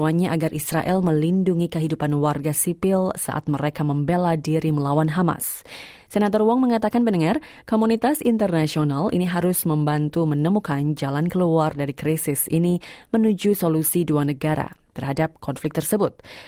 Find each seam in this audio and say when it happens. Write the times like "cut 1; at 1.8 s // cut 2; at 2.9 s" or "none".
none